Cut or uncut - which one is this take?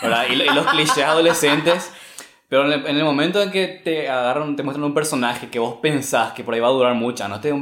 uncut